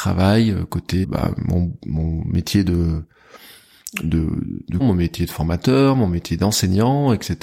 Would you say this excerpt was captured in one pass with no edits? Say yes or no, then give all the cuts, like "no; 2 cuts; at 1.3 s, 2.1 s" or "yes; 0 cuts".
no; 2 cuts; at 1.0 s, 4.8 s